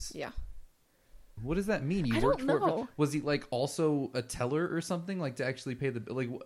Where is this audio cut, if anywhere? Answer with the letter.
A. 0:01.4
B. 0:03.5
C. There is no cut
A